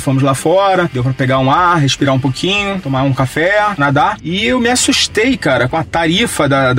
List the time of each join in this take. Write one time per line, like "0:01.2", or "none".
0:03.8
0:05.7